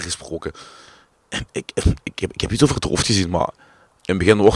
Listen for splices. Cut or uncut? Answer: uncut